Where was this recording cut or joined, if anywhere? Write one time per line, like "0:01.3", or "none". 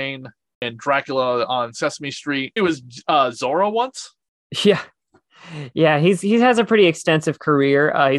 0:02.6